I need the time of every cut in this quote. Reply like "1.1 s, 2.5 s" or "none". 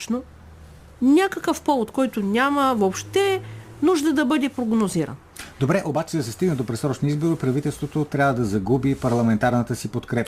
none

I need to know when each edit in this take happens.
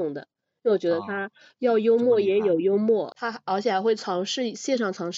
3.1 s

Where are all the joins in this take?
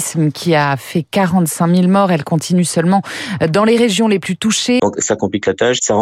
4.8 s

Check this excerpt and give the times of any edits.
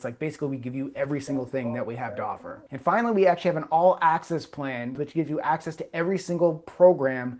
2.7 s, 5.0 s

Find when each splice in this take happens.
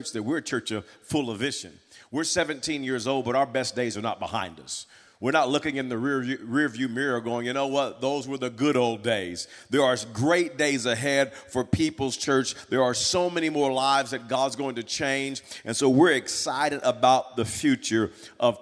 none

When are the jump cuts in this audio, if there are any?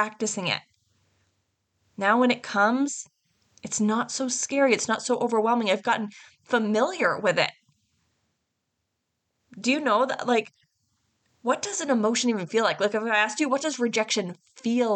none

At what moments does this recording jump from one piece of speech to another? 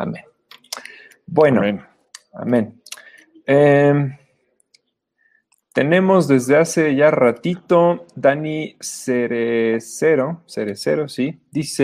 none

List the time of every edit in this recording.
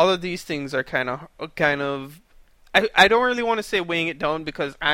none

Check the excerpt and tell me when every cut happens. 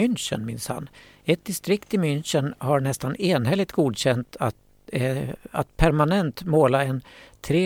none

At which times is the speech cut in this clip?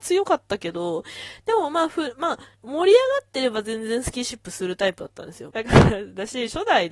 2.5 s, 5.5 s

